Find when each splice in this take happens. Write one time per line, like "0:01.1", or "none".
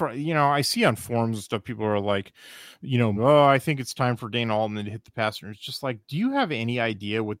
0:03.2